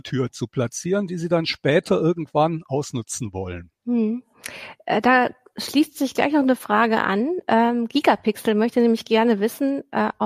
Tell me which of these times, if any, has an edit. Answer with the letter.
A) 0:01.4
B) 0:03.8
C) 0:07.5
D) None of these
B